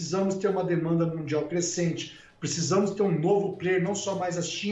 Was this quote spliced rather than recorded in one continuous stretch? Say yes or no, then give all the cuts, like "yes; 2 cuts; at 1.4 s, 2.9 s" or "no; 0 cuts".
no; 0 cuts